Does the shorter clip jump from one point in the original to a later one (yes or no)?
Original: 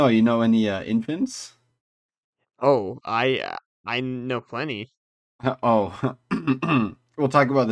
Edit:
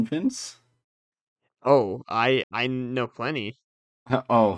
yes